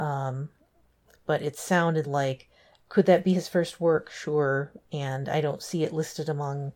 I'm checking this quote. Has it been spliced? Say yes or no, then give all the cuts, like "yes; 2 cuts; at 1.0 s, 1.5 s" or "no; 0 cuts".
no; 0 cuts